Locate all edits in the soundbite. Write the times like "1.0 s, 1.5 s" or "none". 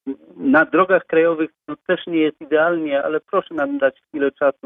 3.0 s